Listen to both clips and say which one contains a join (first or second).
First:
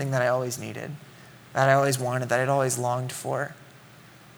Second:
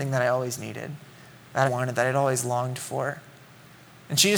second